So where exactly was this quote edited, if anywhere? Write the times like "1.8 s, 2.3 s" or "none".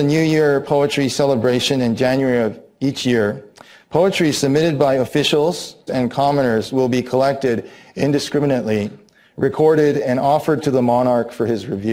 5.9 s